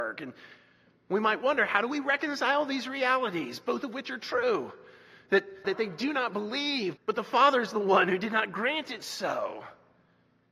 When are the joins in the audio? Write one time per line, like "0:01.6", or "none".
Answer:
0:05.6
0:07.0